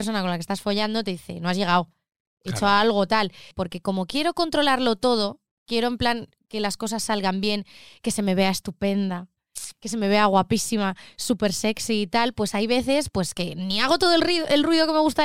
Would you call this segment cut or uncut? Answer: cut